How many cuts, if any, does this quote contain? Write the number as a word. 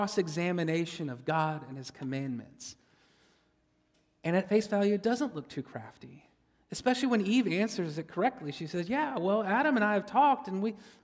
zero